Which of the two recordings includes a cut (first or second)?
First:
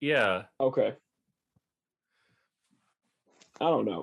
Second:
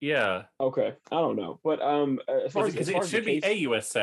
second